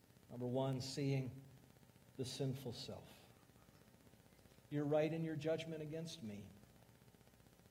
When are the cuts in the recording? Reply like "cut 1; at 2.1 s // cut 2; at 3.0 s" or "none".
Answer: cut 1; at 4.6 s